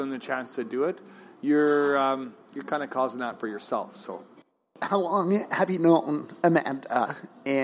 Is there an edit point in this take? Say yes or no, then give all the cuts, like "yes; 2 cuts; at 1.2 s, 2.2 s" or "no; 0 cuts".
no; 0 cuts